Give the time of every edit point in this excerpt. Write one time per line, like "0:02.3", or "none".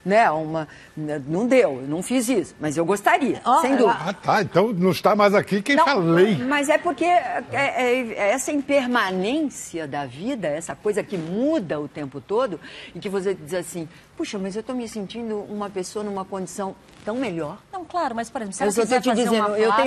0:17.6